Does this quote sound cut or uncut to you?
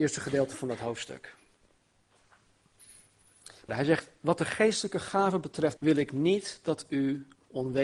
cut